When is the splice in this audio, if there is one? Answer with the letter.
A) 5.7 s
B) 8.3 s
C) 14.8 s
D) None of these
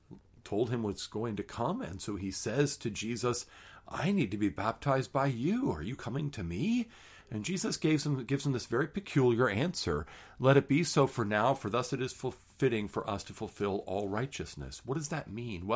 D